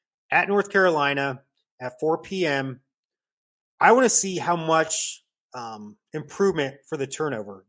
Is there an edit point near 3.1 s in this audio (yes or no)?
no